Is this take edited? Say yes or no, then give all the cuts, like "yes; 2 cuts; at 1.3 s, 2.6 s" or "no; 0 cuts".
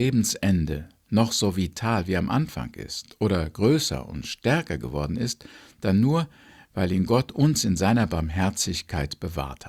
no; 0 cuts